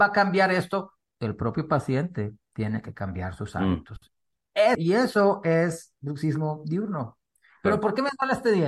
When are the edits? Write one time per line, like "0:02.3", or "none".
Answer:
0:04.7